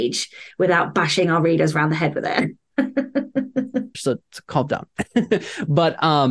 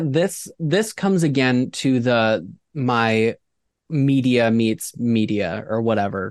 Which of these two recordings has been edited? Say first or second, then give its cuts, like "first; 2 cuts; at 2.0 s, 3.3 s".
first; 1 cut; at 3.9 s